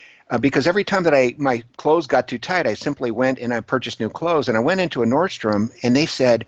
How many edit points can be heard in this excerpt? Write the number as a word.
one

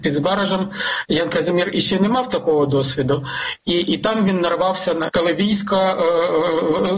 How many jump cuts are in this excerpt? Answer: one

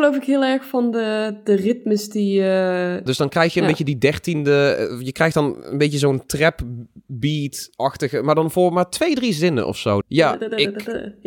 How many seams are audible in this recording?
two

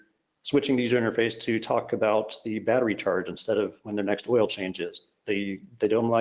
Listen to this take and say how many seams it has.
one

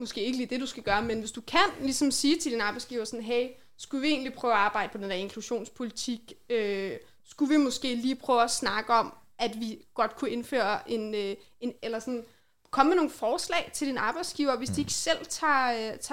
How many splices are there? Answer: one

